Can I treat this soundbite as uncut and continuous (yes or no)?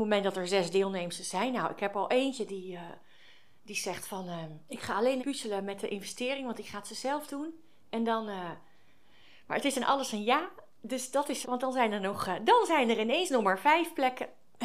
no